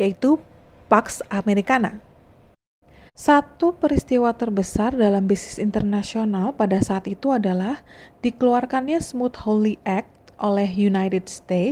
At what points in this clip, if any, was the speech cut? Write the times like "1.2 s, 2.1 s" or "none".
3.1 s